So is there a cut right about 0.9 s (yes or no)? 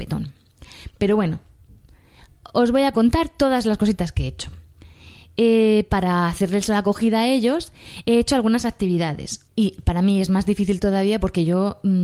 no